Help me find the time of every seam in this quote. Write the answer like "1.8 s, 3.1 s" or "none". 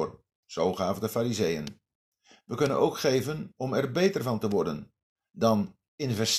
none